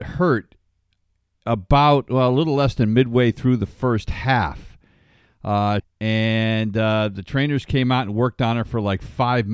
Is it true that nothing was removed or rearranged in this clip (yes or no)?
no